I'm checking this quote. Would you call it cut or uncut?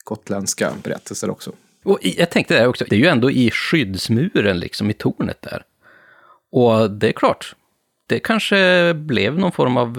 cut